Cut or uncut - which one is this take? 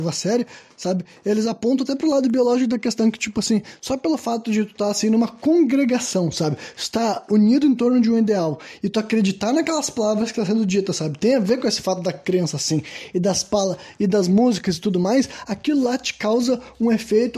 uncut